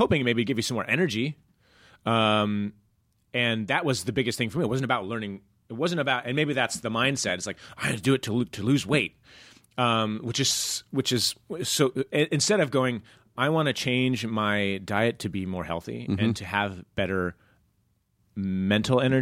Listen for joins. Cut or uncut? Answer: uncut